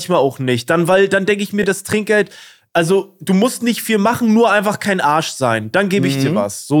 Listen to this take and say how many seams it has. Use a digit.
0